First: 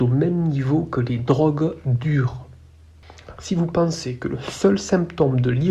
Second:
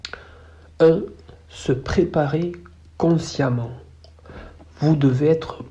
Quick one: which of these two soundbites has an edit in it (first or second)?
first